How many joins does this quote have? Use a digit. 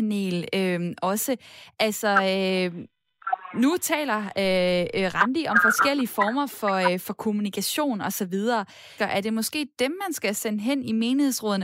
1